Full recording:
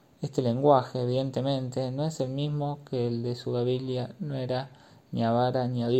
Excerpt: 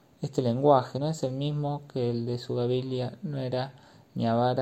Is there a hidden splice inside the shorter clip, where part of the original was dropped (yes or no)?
yes